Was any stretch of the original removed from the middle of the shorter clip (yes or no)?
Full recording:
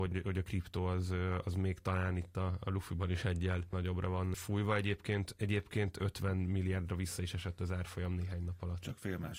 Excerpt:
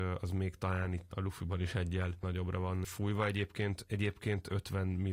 yes